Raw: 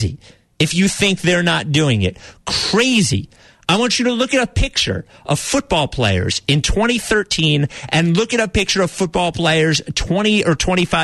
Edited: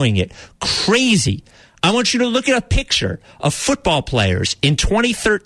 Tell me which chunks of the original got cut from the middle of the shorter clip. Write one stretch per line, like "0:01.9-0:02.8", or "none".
none